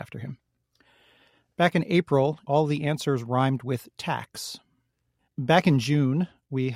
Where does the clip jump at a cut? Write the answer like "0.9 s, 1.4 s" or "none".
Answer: 2.4 s, 5.2 s